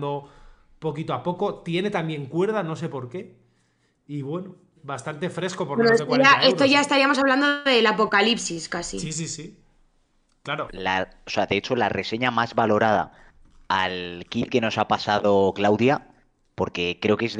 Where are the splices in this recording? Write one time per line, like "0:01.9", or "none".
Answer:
0:04.8
0:10.7